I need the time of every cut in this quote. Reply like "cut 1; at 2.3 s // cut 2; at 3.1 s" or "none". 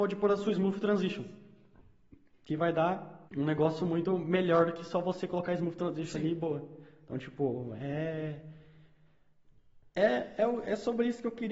cut 1; at 3.3 s